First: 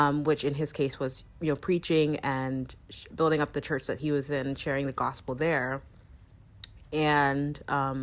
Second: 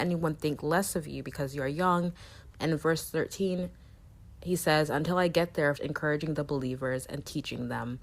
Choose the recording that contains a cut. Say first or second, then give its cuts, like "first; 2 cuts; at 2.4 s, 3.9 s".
second; 2 cuts; at 2.5 s, 5.7 s